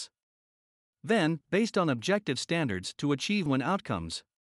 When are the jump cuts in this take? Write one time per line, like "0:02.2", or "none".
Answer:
0:01.4
0:03.5